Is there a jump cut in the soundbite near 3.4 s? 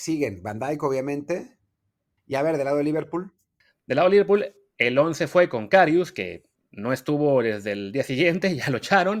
no; 1 cut; at 2.2 s

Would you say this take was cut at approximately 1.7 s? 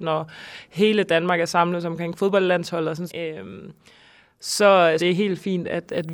no; 2 cuts; at 3.1 s, 5.0 s

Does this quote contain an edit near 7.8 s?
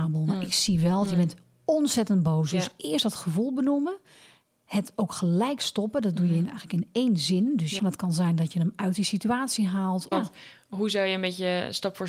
yes; 2 cuts; at 7.8 s, 10.1 s

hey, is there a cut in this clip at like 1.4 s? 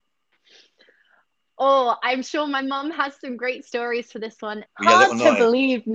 no; 1 cut; at 4.7 s

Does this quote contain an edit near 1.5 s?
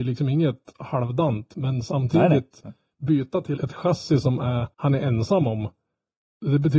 no; 2 cuts; at 3.6 s, 4.7 s

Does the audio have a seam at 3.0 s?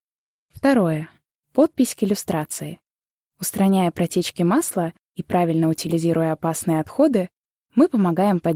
no; 1 cut; at 1.3 s

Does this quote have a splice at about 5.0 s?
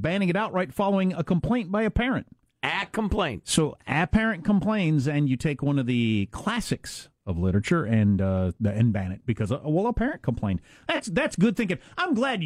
no; 0 cuts

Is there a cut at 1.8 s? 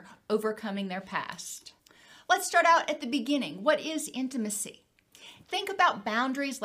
no; 1 cut; at 5.4 s

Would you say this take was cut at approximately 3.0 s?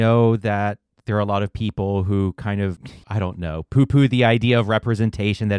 yes; 1 cut; at 3.0 s

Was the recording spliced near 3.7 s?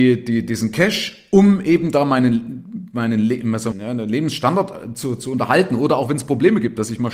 yes; 1 cut; at 3.7 s

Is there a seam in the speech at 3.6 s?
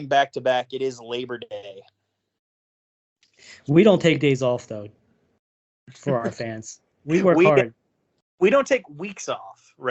no; 0 cuts

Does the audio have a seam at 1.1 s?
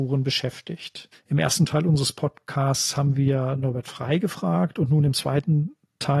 yes; 1 cut; at 1.1 s

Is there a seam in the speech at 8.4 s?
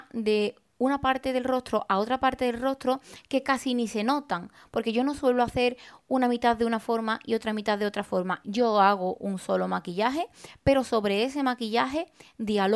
yes; 1 cut; at 8.4 s

